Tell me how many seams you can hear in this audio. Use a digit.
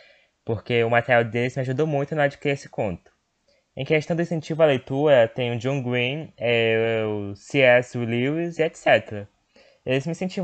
0